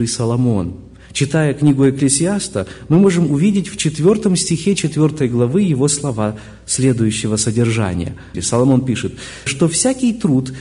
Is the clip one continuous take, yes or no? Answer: no